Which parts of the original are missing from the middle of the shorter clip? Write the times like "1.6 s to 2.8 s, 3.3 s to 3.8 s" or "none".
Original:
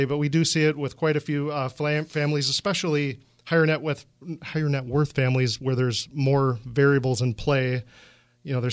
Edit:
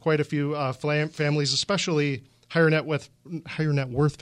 none